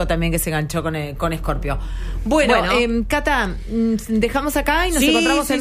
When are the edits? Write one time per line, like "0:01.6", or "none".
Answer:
none